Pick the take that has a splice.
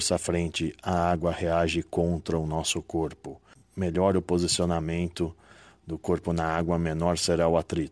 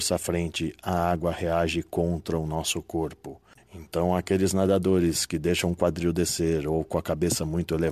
second; 1 cut; at 3.6 s

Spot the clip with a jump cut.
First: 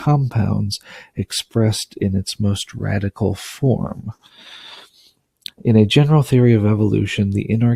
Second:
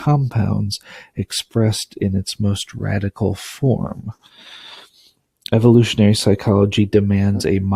first; 1 cut; at 5.5 s

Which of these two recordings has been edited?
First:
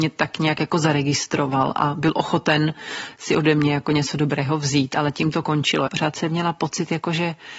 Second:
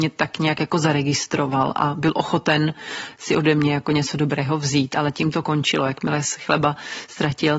first; 1 cut; at 5.9 s

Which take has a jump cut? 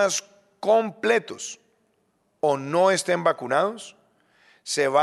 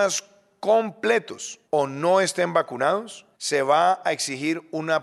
second; 2 cuts; at 1.6 s, 3.3 s

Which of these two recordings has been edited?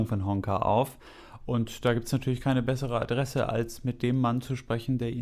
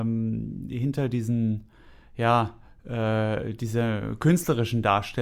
first; 1 cut; at 1.4 s

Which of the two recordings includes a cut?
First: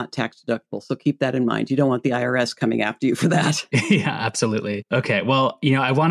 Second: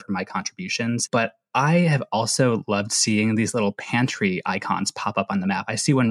second; 1 cut; at 1.1 s

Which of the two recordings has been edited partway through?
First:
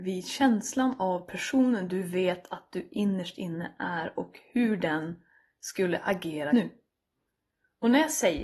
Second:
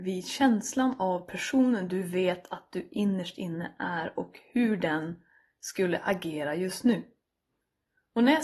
first; 1 cut; at 6.5 s

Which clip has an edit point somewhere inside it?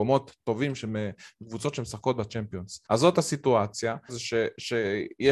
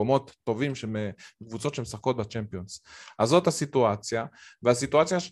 first; 2 cuts; at 2.9 s, 4.1 s

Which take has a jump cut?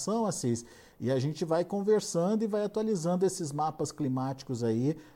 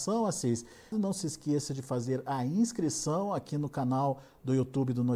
second; 1 cut; at 0.9 s

